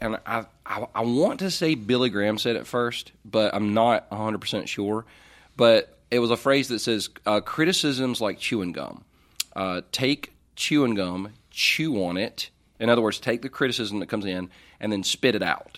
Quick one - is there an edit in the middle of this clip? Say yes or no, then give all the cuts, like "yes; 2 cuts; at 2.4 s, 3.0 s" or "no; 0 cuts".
no; 0 cuts